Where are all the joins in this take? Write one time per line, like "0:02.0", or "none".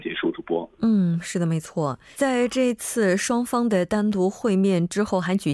0:02.1